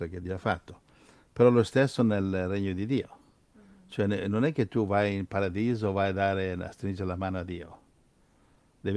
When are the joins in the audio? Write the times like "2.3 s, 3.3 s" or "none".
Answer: none